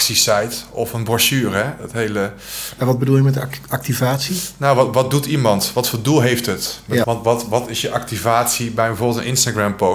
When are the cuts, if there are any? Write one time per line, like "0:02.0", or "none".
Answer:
0:07.0

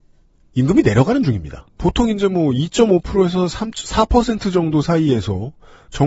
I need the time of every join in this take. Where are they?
0:01.7

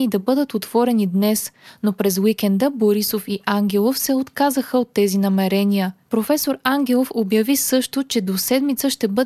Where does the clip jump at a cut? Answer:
0:06.0

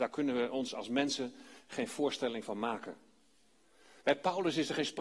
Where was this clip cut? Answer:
0:04.0

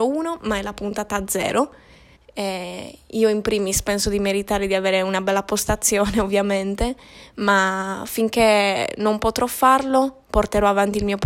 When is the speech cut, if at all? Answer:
0:02.2

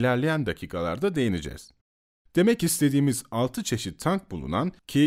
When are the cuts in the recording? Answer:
none

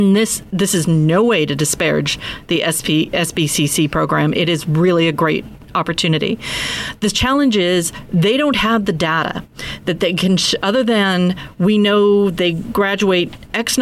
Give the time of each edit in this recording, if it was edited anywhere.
none

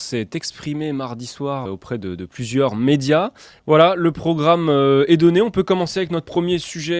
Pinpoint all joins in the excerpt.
0:01.7
0:03.6

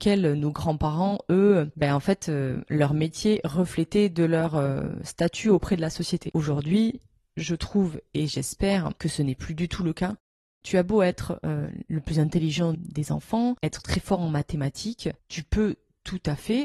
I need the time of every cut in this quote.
0:10.6
0:12.7

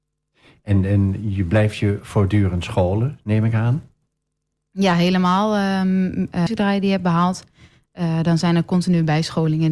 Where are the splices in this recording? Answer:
0:06.5

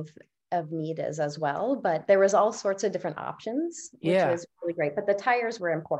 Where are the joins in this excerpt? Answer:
none

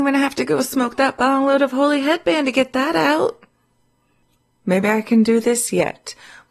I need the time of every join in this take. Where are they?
none

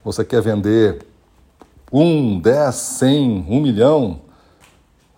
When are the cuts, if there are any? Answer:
none

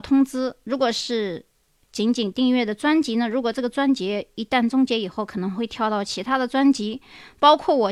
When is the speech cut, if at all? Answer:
none

